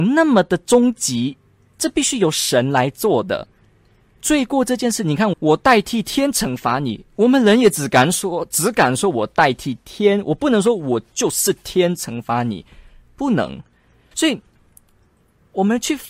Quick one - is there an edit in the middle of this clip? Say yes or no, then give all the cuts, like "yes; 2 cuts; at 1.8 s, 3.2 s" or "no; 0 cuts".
yes; 2 cuts; at 5.3 s, 14.1 s